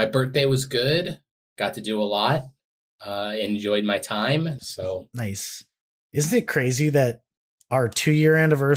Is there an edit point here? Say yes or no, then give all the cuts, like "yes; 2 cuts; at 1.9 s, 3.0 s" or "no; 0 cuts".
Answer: yes; 1 cut; at 4.6 s